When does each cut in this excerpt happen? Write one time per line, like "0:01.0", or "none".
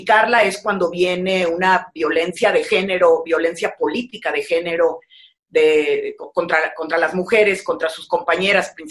none